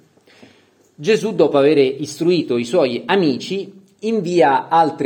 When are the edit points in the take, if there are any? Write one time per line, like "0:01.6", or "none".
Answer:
none